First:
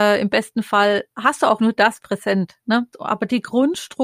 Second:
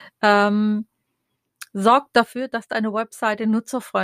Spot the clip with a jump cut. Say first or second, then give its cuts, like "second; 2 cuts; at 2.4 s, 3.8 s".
first; 2 cuts; at 1.6 s, 2.9 s